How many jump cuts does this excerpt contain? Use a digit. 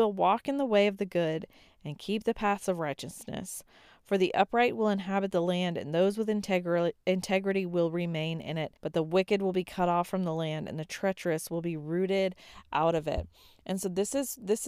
1